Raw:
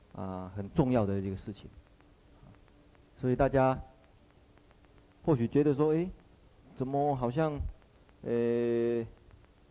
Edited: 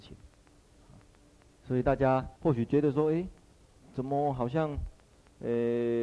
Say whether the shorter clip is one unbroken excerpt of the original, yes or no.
no